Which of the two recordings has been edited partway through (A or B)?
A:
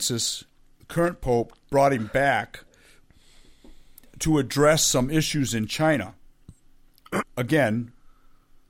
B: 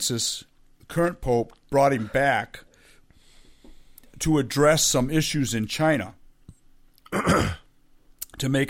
A